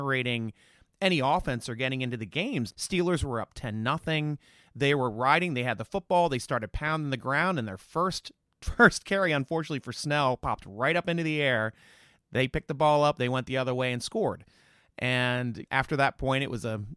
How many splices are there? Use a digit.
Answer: 2